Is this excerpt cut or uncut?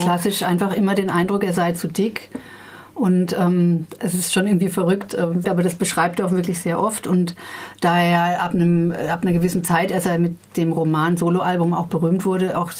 cut